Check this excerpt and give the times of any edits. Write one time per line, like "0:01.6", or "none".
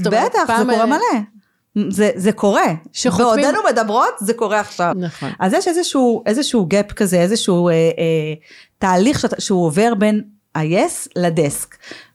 0:04.9